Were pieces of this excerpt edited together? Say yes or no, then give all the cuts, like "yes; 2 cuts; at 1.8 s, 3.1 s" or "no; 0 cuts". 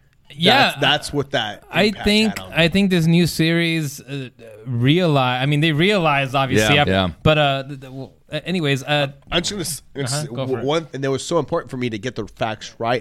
yes; 2 cuts; at 6.8 s, 10.9 s